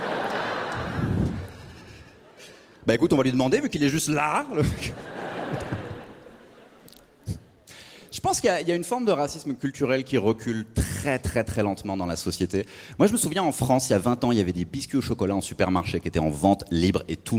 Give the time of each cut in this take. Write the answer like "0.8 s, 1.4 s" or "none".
none